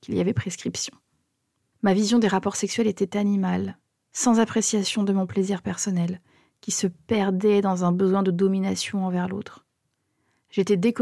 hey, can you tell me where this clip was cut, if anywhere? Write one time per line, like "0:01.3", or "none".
0:01.7